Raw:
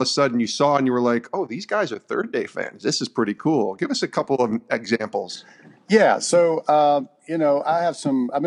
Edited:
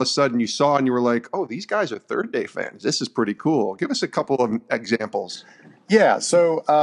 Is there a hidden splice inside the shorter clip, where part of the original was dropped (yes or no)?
no